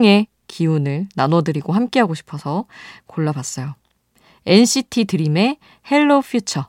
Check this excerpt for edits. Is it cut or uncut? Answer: uncut